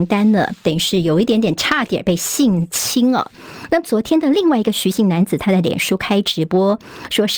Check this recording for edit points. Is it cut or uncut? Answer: uncut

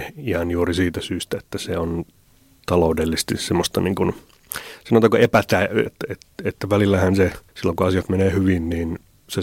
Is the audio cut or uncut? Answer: cut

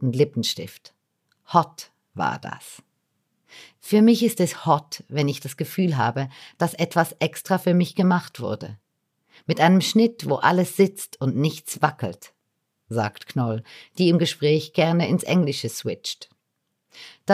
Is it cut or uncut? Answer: uncut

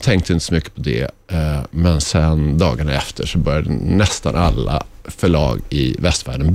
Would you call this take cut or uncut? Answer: uncut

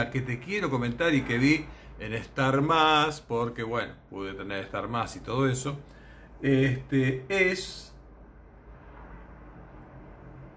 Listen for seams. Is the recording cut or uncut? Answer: uncut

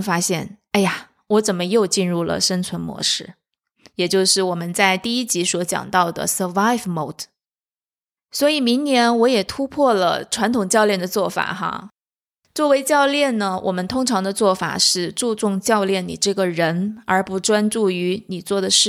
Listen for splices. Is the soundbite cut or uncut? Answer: uncut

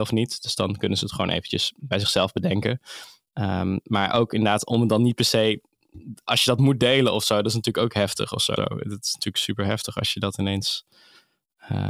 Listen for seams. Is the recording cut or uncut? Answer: cut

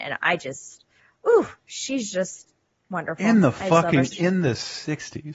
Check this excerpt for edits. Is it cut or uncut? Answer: cut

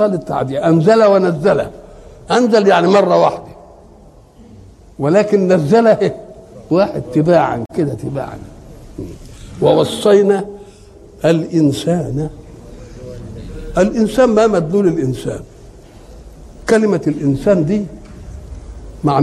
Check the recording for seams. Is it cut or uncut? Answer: uncut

